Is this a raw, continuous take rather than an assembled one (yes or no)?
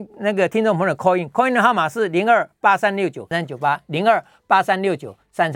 no